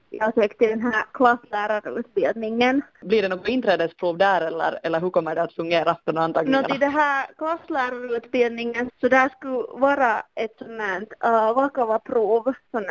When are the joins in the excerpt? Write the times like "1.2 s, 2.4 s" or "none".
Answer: 8.9 s